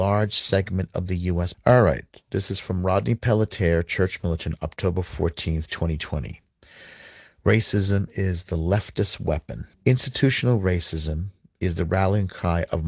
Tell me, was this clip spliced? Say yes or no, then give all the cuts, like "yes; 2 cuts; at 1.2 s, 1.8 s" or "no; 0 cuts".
yes; 2 cuts; at 1.5 s, 9.7 s